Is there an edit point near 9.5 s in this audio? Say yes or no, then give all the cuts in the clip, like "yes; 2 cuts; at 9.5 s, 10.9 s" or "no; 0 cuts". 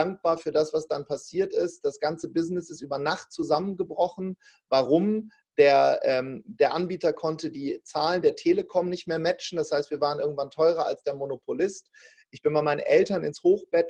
no; 0 cuts